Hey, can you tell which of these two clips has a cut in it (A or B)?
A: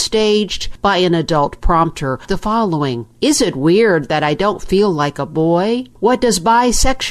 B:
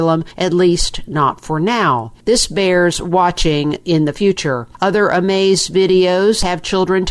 A